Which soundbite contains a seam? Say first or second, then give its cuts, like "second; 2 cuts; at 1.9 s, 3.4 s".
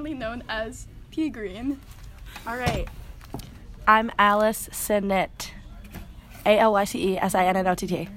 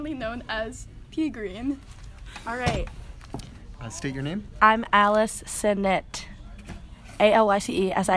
first; 1 cut; at 3.8 s